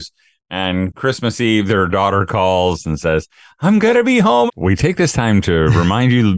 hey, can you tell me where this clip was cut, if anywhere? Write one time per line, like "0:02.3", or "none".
0:04.5